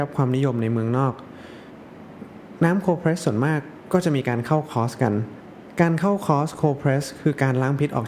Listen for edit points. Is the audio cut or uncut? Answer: uncut